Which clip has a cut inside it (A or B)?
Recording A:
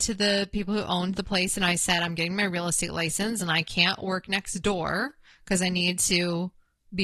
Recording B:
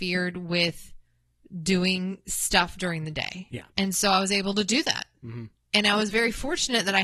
B